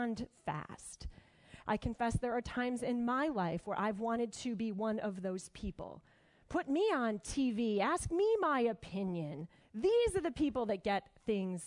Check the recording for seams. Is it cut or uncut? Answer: cut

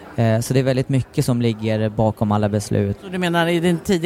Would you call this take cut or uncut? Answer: cut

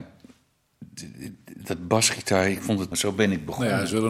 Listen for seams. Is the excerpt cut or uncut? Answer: cut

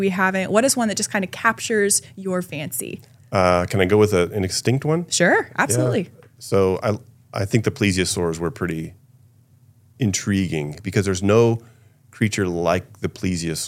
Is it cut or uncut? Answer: uncut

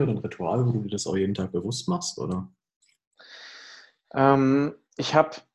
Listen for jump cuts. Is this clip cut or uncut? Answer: uncut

